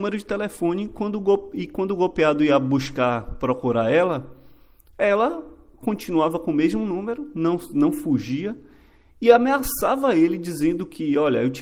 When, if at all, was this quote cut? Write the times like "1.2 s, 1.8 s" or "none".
none